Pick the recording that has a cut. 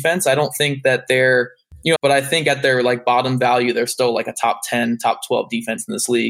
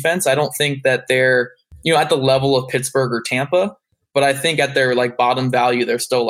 first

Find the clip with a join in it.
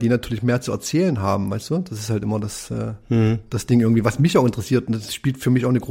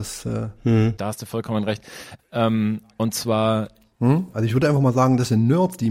second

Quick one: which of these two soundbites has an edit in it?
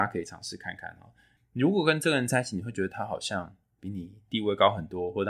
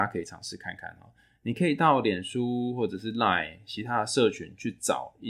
first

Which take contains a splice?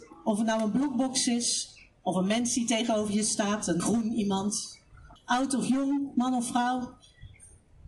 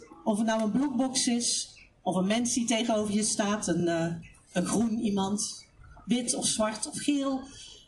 first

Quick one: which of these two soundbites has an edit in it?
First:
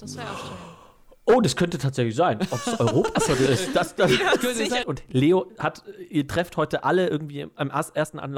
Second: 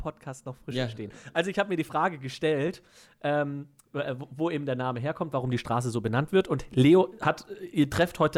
first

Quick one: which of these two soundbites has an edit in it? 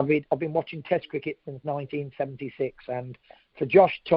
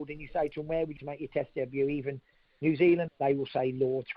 second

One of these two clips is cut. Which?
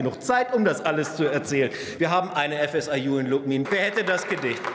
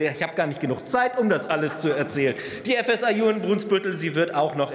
first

